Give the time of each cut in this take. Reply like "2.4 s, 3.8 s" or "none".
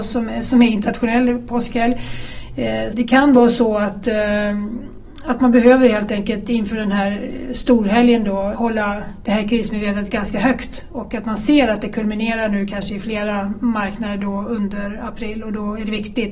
2.9 s, 8.5 s

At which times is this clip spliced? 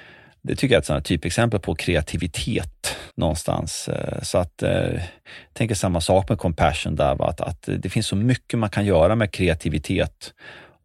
3.1 s

